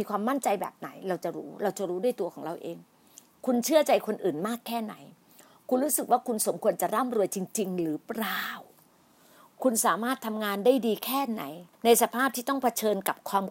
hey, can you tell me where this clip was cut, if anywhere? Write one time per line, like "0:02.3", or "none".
0:11.7